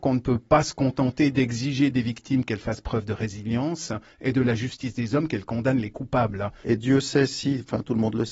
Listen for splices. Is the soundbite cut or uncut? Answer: cut